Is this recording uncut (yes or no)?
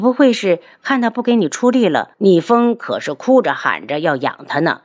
no